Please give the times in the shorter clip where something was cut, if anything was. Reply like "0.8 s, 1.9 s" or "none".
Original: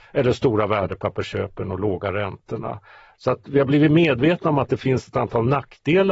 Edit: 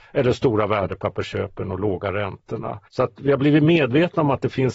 2.9 s